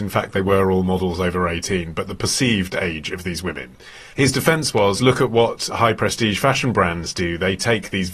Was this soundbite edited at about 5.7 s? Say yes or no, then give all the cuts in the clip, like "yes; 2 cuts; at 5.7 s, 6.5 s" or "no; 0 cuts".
yes; 1 cut; at 5.7 s